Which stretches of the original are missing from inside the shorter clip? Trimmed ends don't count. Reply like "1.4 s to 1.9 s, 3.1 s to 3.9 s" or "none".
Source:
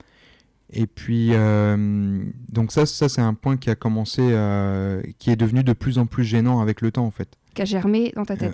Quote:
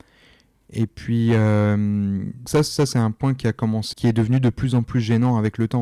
2.5 s to 2.7 s, 4.2 s to 5.2 s